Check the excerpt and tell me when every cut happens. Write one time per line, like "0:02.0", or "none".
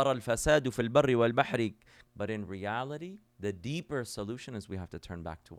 0:02.1
0:03.3